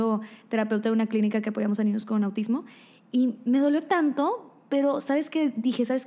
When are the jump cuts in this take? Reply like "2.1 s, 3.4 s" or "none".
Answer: none